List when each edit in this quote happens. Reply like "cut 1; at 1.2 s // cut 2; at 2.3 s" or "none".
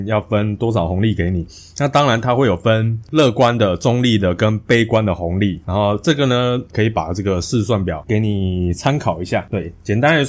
cut 1; at 6.7 s

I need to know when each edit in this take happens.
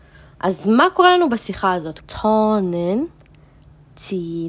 cut 1; at 2.0 s

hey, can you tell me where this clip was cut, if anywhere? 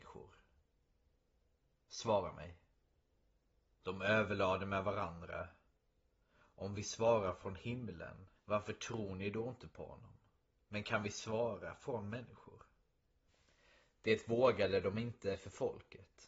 cut 1; at 8.3 s

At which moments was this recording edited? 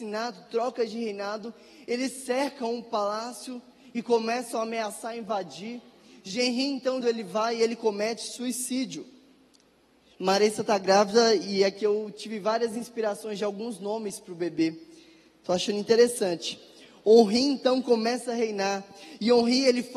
cut 1; at 7.0 s // cut 2; at 10.1 s

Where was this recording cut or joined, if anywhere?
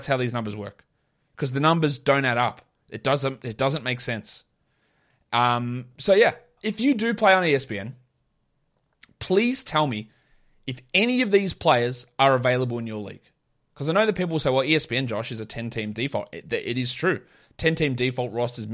cut 1; at 6.6 s

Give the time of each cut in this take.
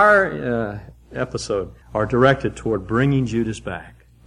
cut 1; at 1.8 s

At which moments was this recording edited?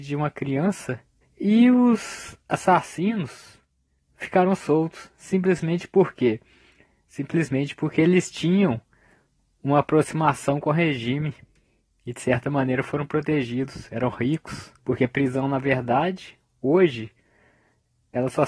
cut 1; at 1.2 s // cut 2; at 14.8 s

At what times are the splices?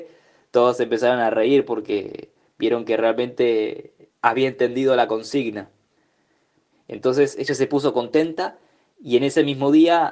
cut 1; at 6.7 s

